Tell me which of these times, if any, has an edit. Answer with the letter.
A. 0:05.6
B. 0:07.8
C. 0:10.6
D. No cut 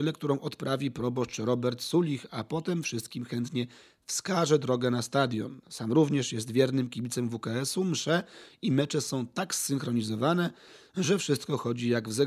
D